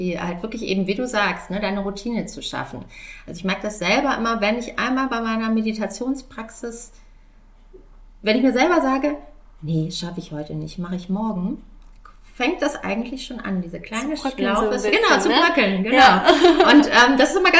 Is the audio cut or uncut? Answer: uncut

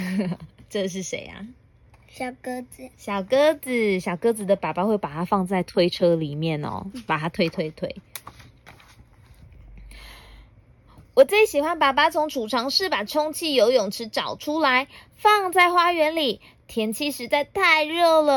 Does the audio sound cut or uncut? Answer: uncut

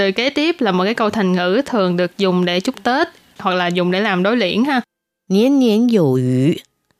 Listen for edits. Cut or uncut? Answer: uncut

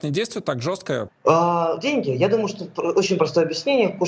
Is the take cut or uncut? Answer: cut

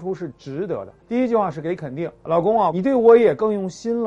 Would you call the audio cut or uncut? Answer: cut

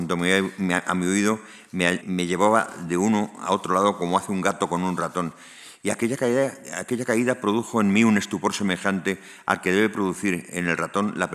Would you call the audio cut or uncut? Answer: cut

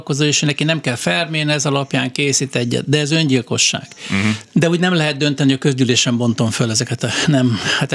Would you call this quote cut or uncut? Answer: cut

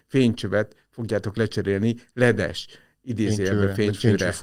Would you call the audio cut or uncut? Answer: uncut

